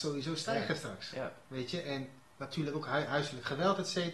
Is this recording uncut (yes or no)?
yes